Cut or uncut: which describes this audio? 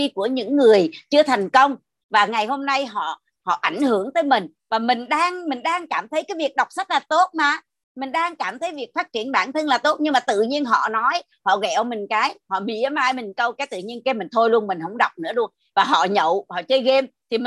uncut